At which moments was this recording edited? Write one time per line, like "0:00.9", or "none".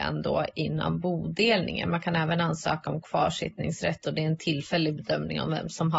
none